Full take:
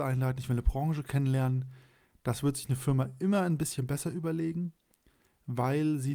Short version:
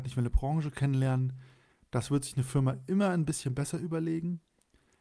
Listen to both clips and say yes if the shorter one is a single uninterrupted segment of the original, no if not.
yes